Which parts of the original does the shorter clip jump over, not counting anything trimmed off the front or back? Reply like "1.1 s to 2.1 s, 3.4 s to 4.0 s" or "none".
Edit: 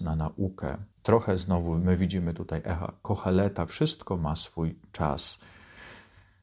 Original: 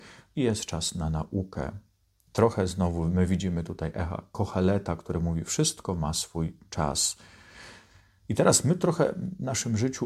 1.9 s to 2.2 s, 5.0 s to 5.5 s